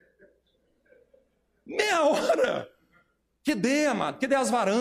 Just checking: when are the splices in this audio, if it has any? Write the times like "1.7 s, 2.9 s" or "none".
3.4 s